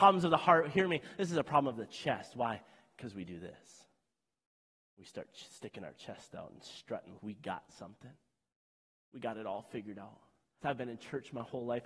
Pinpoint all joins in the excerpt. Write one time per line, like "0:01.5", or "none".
0:07.2
0:10.6